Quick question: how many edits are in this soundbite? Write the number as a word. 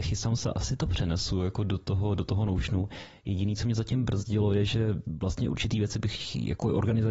zero